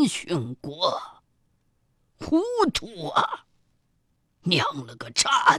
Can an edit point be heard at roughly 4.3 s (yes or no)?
yes